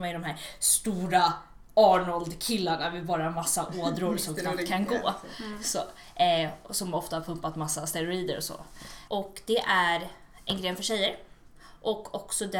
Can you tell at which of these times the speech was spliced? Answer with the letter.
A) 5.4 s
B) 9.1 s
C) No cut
B